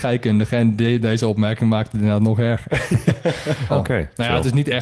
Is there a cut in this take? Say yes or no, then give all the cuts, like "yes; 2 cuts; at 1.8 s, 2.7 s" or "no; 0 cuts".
yes; 1 cut; at 3.7 s